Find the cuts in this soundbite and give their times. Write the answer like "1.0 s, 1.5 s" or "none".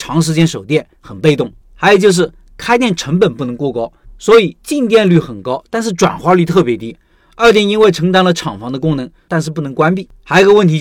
1.6 s, 4.0 s, 9.3 s

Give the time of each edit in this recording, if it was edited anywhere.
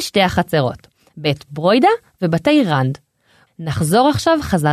3.5 s

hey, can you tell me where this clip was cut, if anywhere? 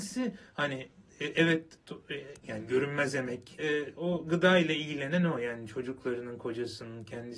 2.4 s, 3.6 s

